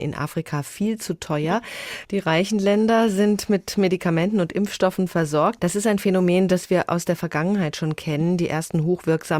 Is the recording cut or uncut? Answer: cut